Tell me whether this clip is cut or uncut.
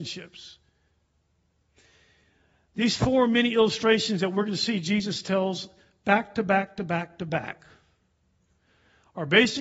uncut